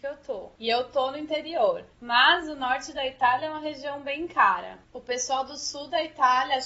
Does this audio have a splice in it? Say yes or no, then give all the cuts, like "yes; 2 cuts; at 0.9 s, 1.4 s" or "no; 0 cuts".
no; 0 cuts